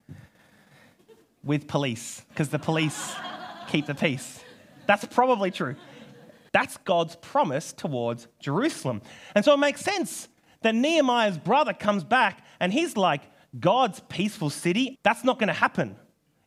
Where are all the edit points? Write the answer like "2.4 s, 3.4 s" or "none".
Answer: 6.5 s, 14.9 s